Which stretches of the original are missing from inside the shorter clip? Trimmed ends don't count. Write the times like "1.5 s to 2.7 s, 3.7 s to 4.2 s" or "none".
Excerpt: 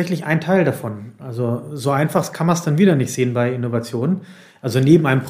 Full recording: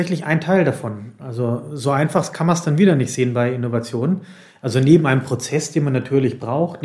none